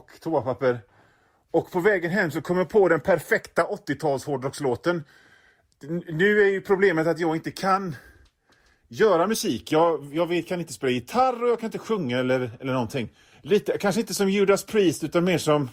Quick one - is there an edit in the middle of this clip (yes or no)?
yes